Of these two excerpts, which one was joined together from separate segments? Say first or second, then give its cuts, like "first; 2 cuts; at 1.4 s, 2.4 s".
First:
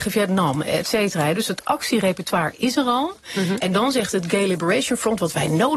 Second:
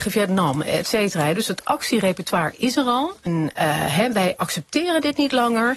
second; 1 cut; at 3.3 s